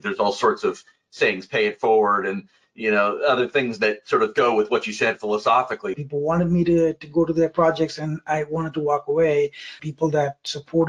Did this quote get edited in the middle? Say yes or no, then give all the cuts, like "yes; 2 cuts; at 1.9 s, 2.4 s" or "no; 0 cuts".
yes; 2 cuts; at 5.9 s, 9.8 s